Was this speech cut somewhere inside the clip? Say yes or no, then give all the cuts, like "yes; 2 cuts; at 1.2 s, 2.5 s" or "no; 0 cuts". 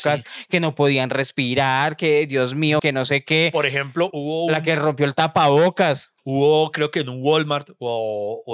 yes; 3 cuts; at 2.8 s, 4.1 s, 6.2 s